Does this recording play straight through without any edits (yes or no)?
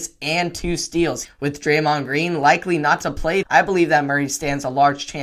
no